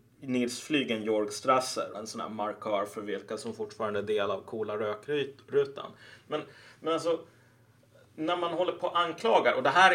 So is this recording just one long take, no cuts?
no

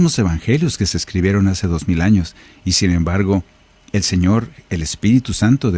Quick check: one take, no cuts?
yes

